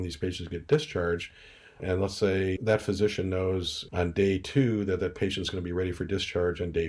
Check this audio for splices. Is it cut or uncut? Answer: uncut